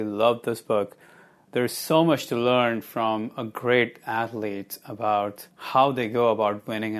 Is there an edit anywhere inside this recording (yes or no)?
yes